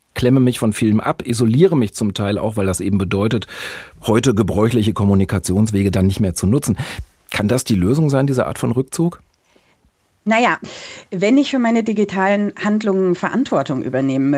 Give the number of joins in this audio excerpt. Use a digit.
0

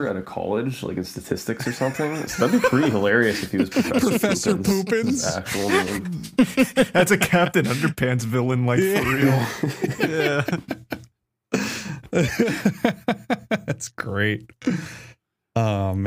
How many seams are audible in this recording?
0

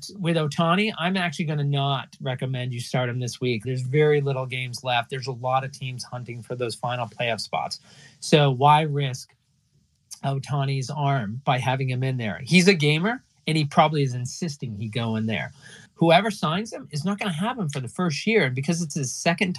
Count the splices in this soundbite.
2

